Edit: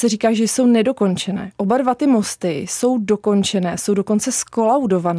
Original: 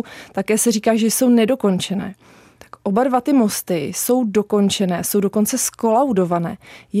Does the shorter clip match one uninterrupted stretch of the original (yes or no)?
no